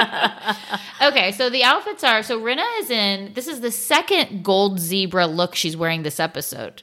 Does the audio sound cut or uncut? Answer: uncut